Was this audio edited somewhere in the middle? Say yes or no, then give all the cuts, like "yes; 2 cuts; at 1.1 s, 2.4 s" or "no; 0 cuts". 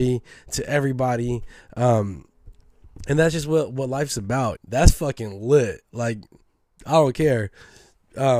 yes; 1 cut; at 4.6 s